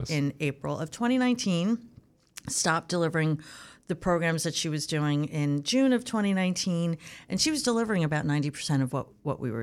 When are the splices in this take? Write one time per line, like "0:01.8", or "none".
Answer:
none